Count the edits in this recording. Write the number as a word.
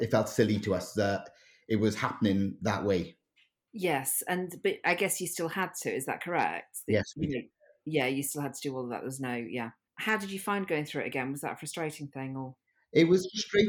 zero